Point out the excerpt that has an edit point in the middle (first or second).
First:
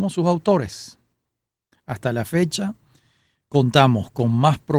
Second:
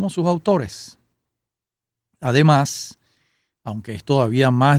first